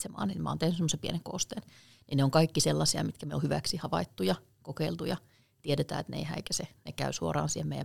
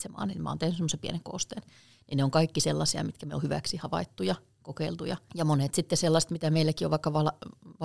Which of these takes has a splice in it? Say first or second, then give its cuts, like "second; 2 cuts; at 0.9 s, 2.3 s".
second; 1 cut; at 5.3 s